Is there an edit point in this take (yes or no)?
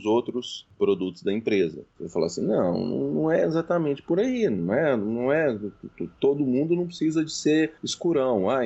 yes